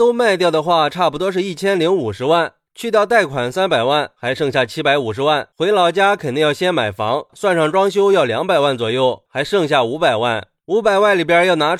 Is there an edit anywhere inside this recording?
yes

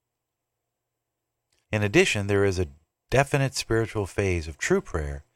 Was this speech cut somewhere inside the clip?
yes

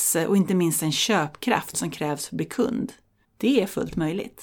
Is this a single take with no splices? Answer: no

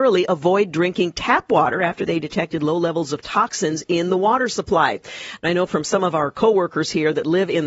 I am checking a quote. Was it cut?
yes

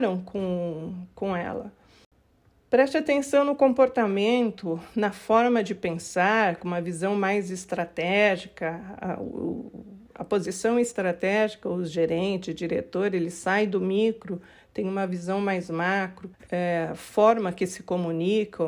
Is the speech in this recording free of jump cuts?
no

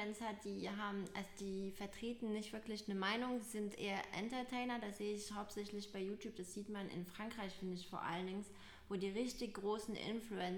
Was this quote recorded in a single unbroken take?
yes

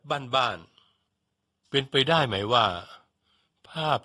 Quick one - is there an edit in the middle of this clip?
no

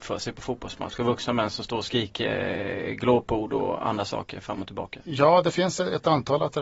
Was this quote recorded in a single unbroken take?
yes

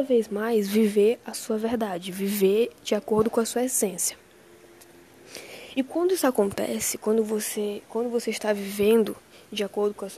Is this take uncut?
yes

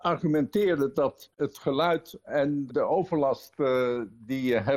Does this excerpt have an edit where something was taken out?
yes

